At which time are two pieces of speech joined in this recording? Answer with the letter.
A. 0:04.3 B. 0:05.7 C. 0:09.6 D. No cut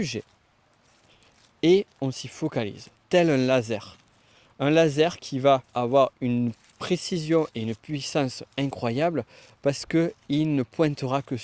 B